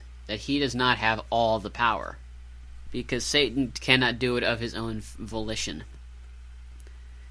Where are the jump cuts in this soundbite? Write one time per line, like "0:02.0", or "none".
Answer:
0:02.9

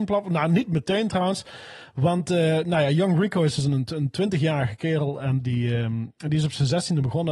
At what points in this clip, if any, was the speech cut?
none

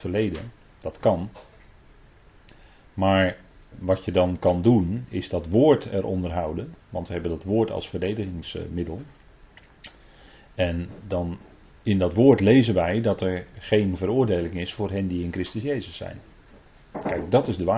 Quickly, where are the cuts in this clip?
0:03.7

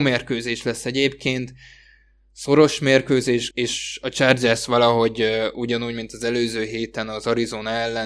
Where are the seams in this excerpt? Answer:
0:03.5

